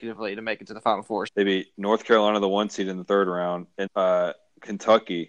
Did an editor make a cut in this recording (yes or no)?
yes